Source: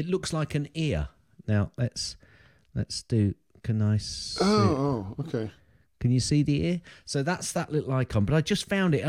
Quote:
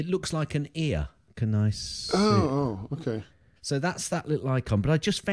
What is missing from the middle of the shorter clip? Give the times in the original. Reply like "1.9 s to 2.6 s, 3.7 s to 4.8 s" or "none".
1.3 s to 3.5 s, 5.8 s to 7.0 s